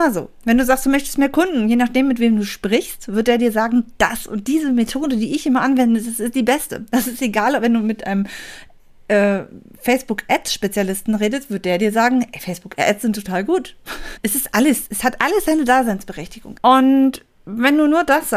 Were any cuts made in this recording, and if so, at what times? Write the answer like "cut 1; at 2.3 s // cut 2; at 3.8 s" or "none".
cut 1; at 14.2 s // cut 2; at 16.6 s